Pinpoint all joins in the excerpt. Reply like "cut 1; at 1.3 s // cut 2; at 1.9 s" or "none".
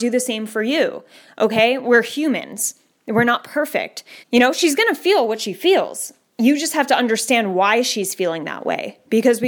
cut 1; at 4.2 s